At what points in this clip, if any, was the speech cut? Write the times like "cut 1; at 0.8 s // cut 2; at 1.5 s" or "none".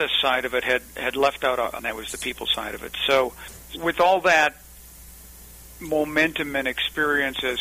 cut 1; at 1.8 s // cut 2; at 3.7 s